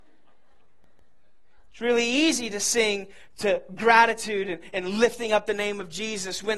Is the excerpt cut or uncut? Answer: cut